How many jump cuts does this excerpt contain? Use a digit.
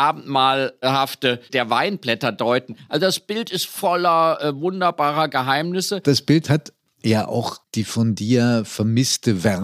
0